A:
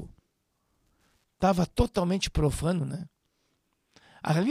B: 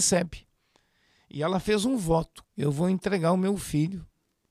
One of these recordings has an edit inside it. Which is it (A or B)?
B